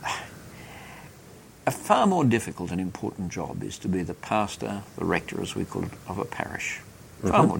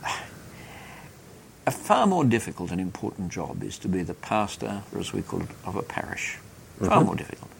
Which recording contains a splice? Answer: second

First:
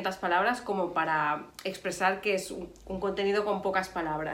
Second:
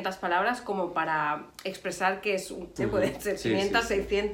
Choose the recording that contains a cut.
second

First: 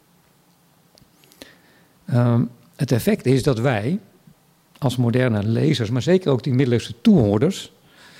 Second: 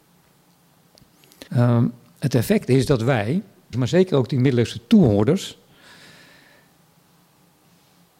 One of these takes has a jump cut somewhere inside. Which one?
second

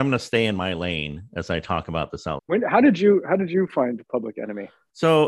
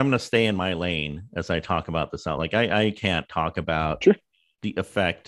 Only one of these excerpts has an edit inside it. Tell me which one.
first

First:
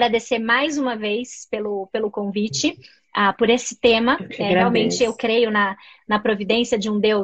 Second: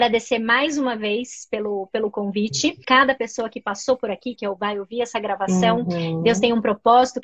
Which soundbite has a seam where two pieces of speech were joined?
second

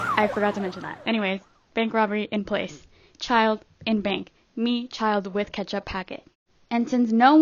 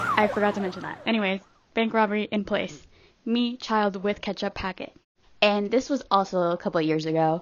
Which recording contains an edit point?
second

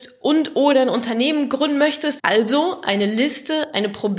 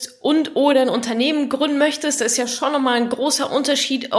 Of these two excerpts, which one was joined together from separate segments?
first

